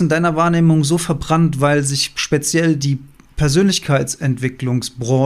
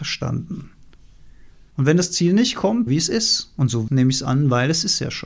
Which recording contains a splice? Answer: second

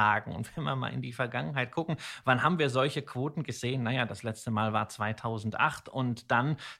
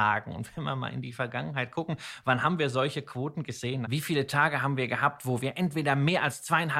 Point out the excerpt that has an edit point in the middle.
second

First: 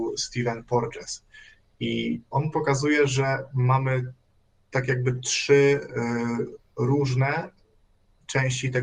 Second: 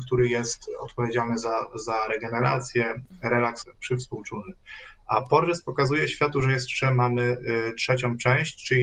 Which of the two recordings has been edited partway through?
second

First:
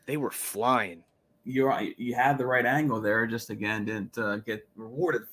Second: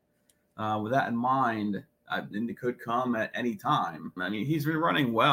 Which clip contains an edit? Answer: second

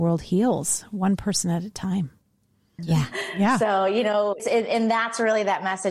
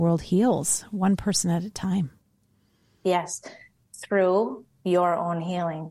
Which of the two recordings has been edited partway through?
first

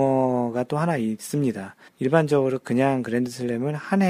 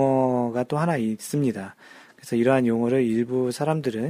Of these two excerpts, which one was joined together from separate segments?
first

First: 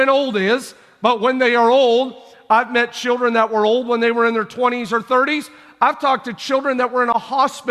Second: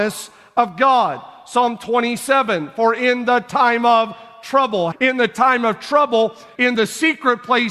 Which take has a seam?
second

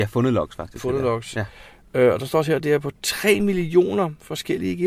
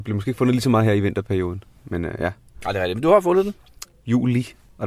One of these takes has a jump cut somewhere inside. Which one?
second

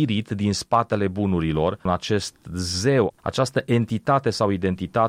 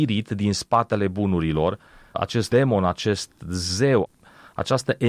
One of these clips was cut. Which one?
first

